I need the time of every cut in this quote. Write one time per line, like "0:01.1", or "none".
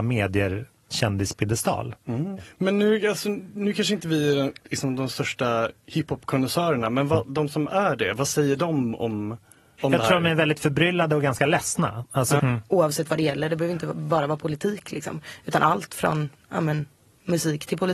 0:12.4